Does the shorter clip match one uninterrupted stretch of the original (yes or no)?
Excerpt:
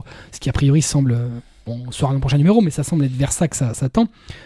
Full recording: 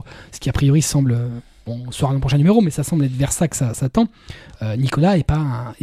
yes